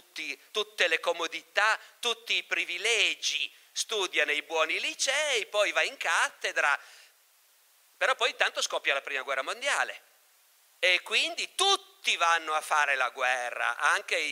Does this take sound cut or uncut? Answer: uncut